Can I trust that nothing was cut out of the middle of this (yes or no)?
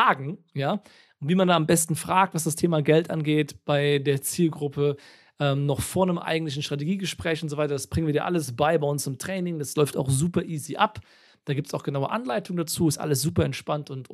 yes